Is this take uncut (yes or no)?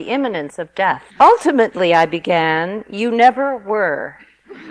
no